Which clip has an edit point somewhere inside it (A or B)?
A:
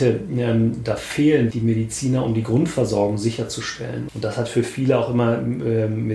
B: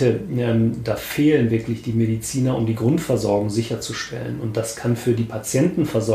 A